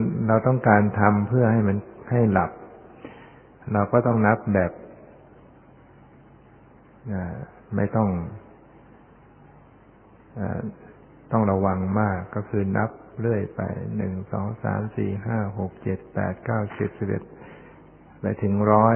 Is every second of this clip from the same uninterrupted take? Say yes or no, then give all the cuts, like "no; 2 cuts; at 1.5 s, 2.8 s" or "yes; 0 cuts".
yes; 0 cuts